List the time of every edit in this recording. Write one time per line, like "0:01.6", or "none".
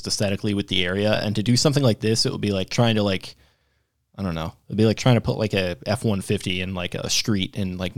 none